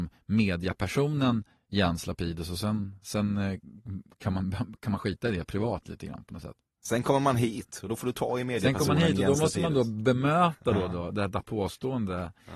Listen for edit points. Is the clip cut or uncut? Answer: uncut